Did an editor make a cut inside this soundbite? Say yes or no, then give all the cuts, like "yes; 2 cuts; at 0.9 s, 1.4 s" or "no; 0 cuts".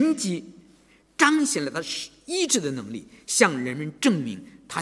no; 0 cuts